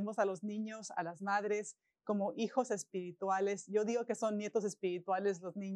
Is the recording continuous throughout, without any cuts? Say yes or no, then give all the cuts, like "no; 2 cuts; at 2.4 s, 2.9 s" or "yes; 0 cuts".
yes; 0 cuts